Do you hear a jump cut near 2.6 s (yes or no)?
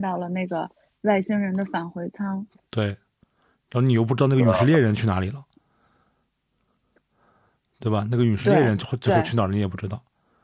no